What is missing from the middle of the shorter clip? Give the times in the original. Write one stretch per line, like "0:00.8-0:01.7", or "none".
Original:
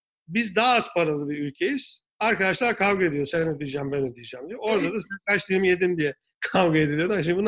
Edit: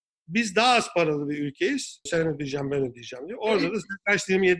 0:02.1-0:03.3